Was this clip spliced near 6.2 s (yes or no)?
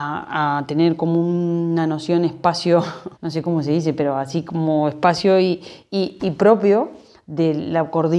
yes